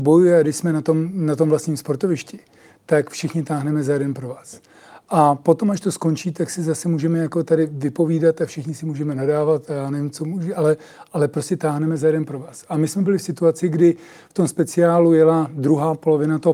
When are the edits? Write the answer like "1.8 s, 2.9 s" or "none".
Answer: none